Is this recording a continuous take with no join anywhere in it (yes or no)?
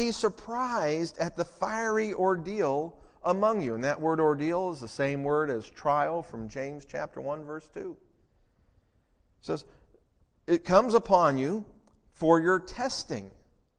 yes